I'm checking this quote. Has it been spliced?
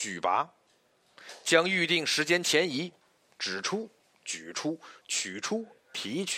yes; 1 cut; at 5.0 s

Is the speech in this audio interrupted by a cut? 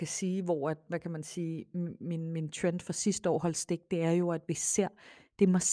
no; 0 cuts

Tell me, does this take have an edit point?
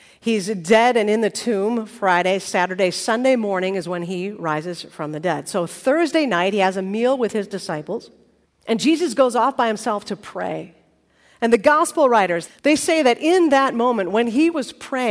yes; 2 cuts; at 8.5 s, 12.5 s

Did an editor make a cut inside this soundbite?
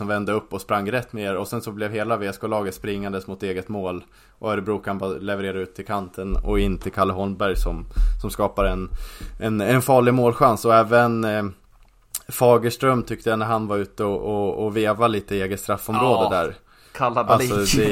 no; 0 cuts

